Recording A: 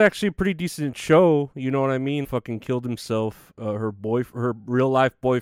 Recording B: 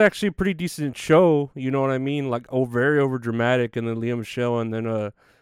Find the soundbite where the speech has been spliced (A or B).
A